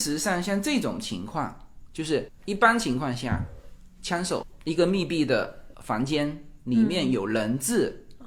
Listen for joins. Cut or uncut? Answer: uncut